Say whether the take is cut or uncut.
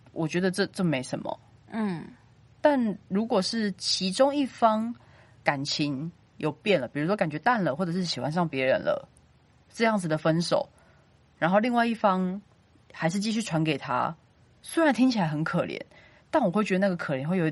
uncut